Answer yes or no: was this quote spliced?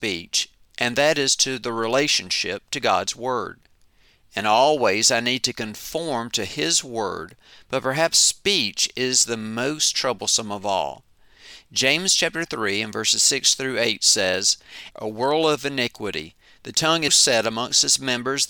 yes